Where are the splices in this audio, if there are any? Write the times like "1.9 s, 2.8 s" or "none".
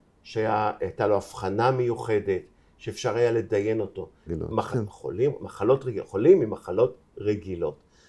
4.3 s